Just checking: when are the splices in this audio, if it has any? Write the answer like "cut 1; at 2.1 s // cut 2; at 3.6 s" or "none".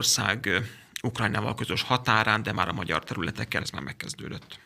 cut 1; at 3.6 s